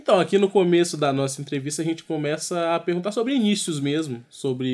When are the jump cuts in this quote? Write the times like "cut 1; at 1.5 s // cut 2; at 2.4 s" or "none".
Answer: none